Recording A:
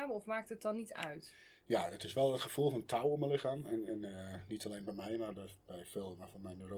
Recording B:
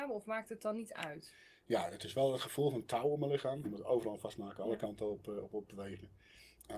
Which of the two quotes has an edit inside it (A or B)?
B